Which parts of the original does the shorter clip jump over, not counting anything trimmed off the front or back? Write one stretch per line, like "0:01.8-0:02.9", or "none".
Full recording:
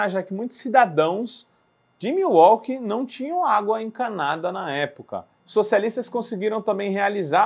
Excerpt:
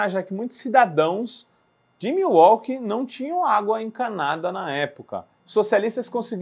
none